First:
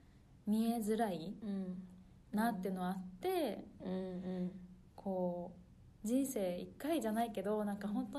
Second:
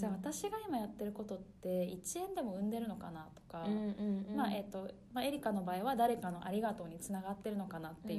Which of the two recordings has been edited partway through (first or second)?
first